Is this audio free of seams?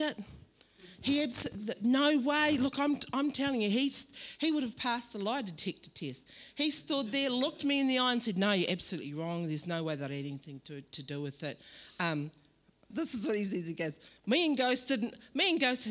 no; 2 cuts; at 12.9 s, 14.2 s

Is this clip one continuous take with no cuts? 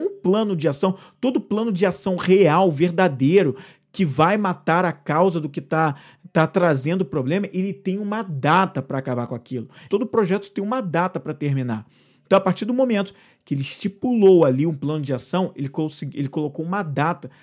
no; 1 cut; at 9.9 s

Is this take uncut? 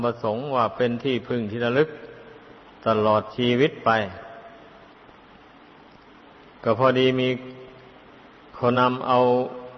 no; 1 cut; at 8.7 s

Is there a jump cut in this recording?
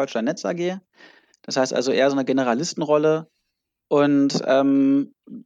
no; 0 cuts

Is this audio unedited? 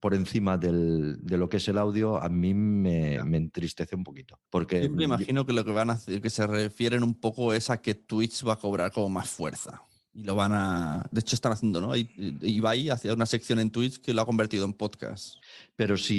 no; 1 cut; at 4.5 s

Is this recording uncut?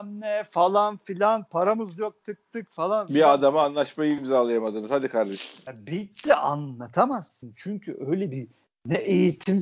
yes; 0 cuts

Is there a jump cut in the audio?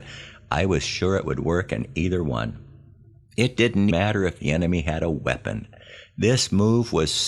yes; 1 cut; at 3.9 s

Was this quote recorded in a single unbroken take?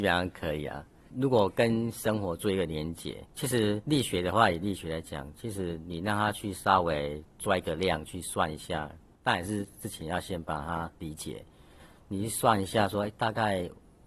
no; 2 cuts; at 3.3 s, 9.1 s

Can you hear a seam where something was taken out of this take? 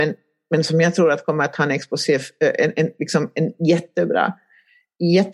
no; 0 cuts

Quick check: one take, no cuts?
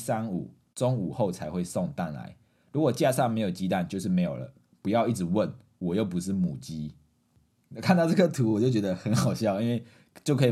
yes; 0 cuts

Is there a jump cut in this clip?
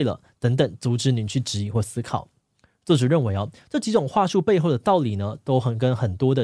no; 0 cuts

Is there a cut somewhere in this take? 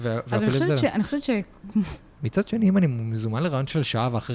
yes; 1 cut; at 2.2 s

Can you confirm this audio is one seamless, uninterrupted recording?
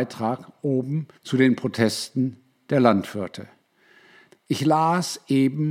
no; 2 cuts; at 1.2 s, 4.3 s

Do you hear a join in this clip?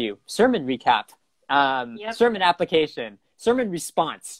no; 0 cuts

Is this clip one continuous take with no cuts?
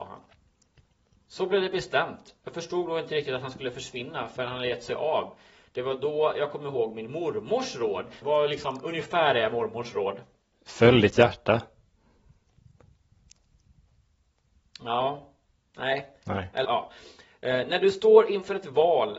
no; 2 cuts; at 8.2 s, 16.6 s

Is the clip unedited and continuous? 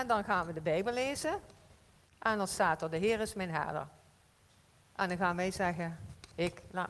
yes; 0 cuts

